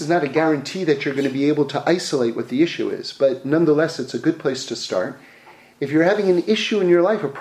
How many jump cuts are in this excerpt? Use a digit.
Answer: 0